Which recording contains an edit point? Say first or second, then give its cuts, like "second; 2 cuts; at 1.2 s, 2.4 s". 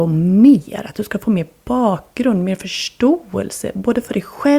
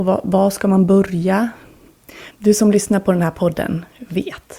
second; 1 cut; at 2.3 s